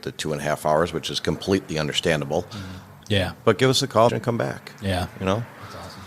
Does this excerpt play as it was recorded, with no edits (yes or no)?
no